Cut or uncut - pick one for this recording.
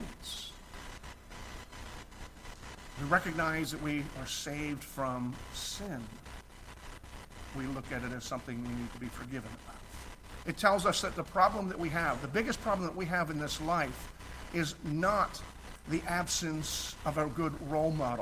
cut